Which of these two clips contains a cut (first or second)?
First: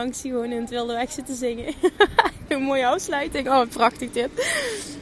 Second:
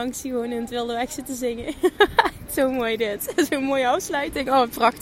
first